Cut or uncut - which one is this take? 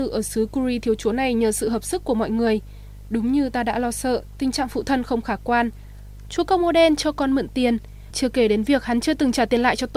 cut